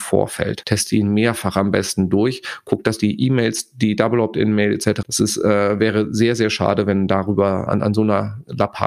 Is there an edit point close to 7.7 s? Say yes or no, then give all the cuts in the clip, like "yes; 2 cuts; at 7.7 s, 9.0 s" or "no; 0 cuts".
yes; 2 cuts; at 5.0 s, 7.7 s